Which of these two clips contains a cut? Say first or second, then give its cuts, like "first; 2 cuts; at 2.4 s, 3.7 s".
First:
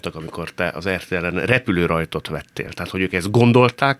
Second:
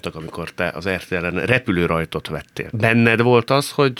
second; 1 cut; at 2.7 s